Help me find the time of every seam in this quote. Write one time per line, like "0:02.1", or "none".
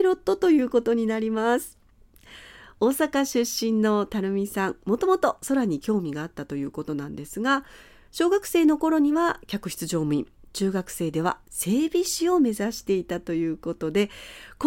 none